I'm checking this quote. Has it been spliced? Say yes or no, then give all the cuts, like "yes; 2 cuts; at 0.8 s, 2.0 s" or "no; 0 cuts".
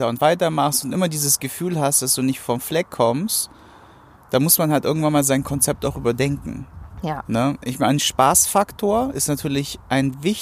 no; 0 cuts